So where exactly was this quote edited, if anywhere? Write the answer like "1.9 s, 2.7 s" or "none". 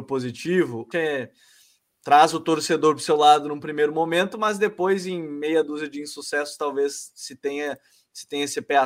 0.9 s